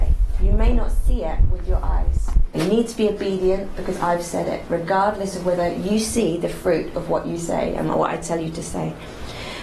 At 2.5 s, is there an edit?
yes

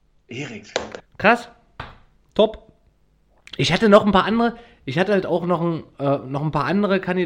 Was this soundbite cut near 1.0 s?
yes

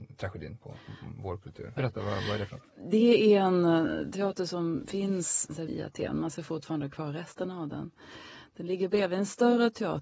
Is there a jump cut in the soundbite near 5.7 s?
yes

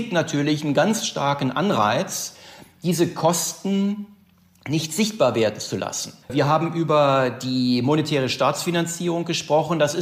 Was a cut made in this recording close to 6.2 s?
yes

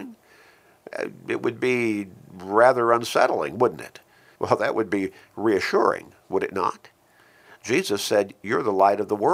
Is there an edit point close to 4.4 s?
yes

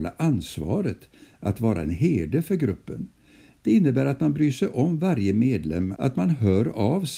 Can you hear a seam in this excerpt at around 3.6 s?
no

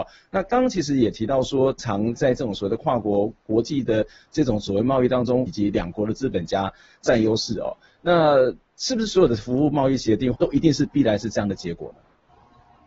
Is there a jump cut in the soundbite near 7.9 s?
no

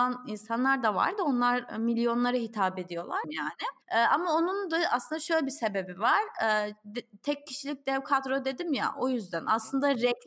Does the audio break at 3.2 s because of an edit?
yes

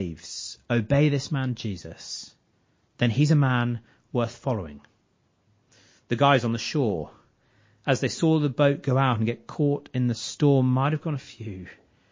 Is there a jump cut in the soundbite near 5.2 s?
no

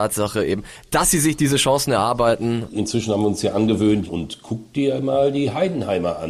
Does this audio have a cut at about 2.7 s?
yes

